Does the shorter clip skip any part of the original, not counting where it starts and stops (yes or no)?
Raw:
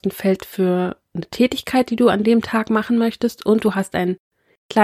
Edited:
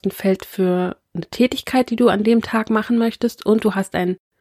no